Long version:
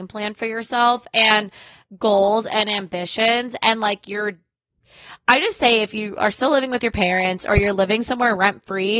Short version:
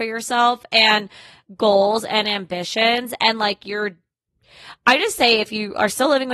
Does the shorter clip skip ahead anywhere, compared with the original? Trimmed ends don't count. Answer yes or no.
no